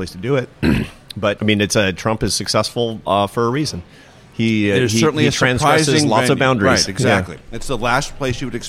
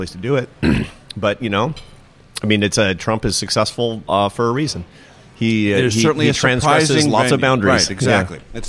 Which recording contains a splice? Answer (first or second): first